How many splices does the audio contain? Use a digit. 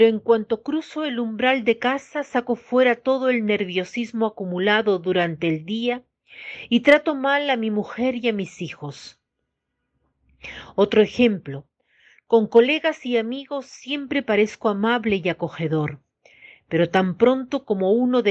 0